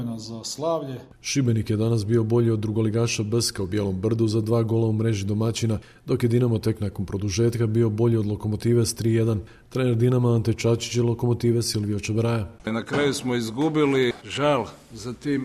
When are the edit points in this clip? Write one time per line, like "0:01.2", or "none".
0:12.6
0:14.2